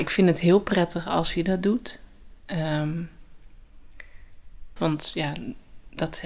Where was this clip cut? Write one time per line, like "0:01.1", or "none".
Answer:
0:04.8

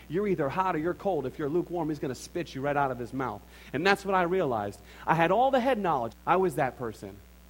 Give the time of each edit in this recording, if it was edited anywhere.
0:05.1
0:06.1

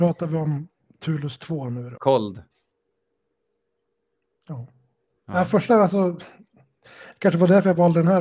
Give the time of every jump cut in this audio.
0:02.0

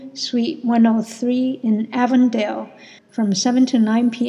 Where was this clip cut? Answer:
0:03.0

